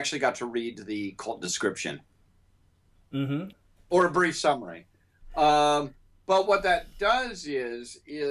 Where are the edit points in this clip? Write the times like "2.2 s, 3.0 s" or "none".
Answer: 3.5 s